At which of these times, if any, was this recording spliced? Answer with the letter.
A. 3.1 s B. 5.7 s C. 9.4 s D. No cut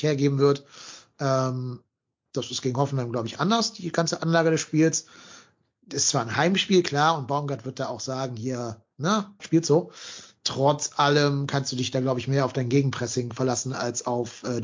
C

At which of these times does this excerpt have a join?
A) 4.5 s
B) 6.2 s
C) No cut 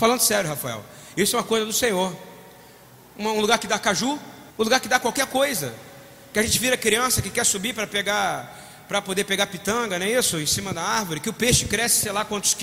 A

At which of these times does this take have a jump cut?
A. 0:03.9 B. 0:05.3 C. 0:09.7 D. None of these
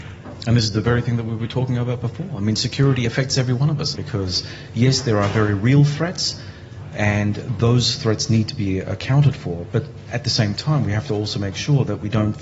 A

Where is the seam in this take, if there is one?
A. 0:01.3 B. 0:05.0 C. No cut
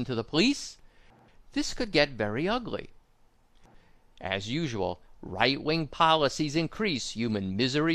B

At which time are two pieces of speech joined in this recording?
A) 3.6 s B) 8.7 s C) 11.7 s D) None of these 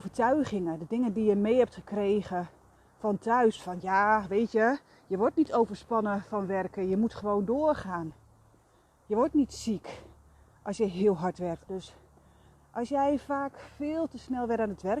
C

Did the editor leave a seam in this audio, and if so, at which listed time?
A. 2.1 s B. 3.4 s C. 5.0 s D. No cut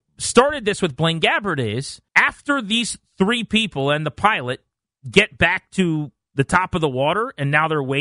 A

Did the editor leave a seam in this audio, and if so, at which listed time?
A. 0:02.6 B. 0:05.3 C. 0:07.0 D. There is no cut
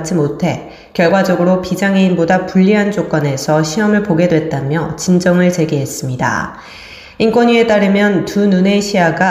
C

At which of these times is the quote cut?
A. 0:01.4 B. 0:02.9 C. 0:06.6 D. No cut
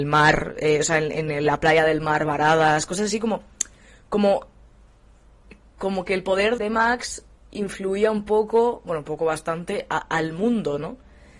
C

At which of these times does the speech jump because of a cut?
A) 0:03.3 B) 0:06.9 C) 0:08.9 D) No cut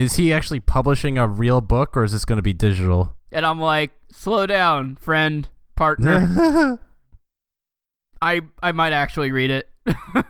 A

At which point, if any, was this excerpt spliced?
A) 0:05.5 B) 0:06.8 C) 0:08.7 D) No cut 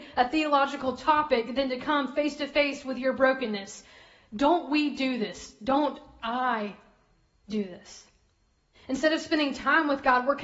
C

